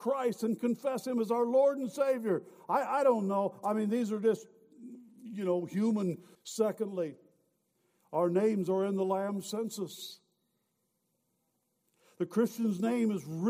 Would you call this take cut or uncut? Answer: cut